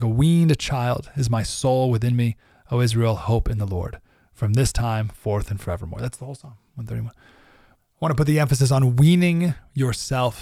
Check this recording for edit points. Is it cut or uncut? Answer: uncut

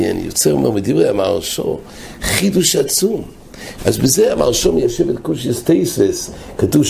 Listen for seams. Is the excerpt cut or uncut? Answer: cut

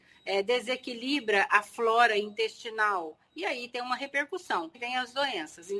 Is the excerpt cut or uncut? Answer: cut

